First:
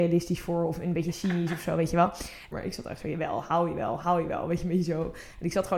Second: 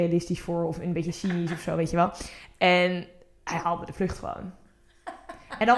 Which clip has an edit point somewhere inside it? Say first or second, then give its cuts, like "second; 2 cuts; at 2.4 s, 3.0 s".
first; 1 cut; at 2.5 s